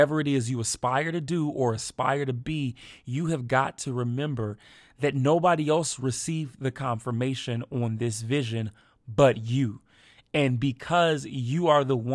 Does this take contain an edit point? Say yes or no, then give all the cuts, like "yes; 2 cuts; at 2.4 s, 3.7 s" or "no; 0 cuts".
no; 0 cuts